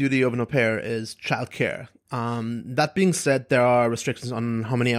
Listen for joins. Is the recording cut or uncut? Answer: uncut